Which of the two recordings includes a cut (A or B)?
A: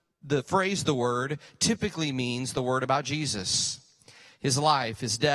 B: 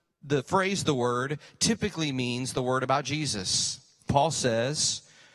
B